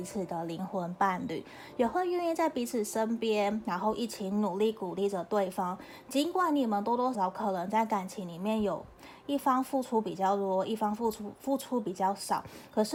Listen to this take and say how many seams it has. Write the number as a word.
one